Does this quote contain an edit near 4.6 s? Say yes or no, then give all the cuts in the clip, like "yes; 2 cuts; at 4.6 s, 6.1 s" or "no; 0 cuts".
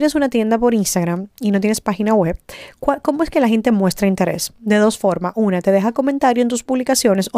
no; 0 cuts